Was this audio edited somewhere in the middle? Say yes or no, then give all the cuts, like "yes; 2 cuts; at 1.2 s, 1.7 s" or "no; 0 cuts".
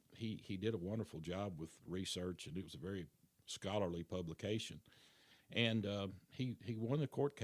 no; 0 cuts